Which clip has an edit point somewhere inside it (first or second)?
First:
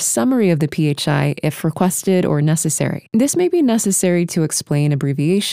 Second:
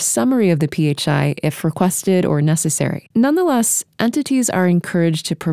second